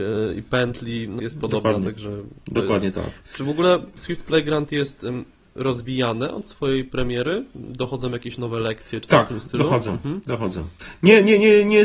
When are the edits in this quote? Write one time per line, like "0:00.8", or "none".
0:01.2